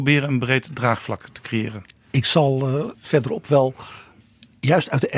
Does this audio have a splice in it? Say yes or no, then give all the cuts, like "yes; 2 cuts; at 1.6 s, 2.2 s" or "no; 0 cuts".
yes; 1 cut; at 2.9 s